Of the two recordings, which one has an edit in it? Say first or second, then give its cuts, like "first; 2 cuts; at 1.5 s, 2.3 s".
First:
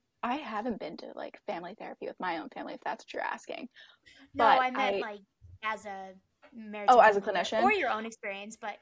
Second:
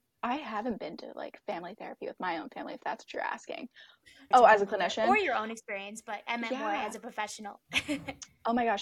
second; 1 cut; at 4.3 s